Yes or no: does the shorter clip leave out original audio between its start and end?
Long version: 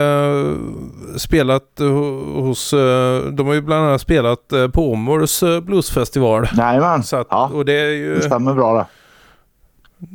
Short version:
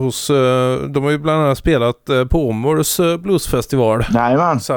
no